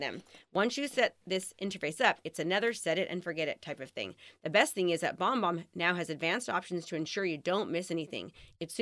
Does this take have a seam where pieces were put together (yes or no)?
no